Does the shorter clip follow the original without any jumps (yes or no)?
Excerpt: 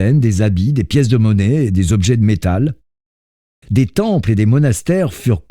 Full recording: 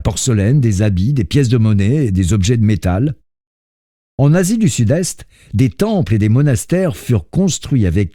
no